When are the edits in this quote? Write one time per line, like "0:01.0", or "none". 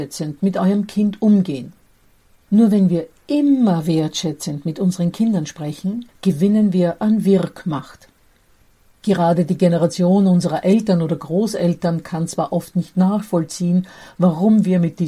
0:02.4
0:06.1